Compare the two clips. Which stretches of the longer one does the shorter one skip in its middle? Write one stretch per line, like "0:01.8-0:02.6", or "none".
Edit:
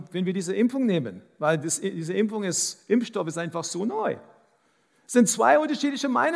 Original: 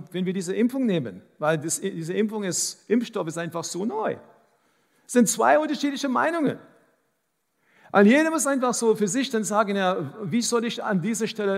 none